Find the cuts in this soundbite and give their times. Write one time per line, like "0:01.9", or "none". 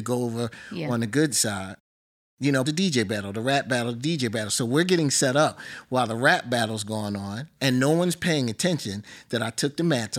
0:02.6